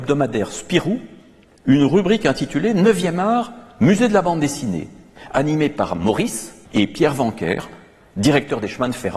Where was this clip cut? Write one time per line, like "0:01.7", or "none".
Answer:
0:06.7